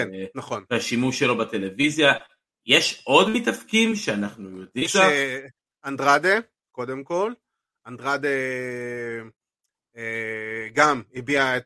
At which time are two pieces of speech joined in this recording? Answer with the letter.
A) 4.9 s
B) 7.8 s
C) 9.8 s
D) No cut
A